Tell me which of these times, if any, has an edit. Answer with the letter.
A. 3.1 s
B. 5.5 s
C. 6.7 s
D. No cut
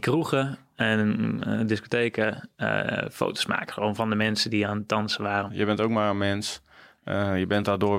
B